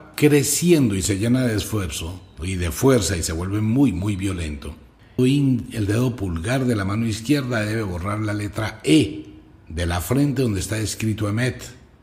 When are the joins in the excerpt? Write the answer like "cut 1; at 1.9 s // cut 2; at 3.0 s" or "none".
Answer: cut 1; at 5.2 s